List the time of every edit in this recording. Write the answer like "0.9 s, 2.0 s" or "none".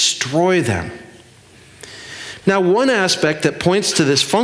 2.4 s